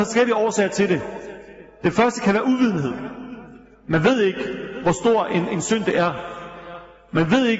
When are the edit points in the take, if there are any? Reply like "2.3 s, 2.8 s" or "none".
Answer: none